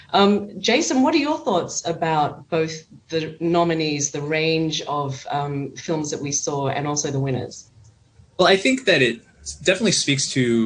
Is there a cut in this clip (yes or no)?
no